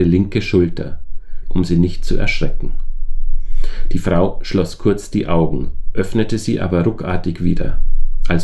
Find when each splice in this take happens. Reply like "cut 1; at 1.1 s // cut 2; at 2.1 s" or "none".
cut 1; at 1.4 s